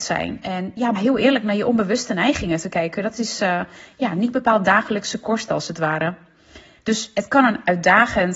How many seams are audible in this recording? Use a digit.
2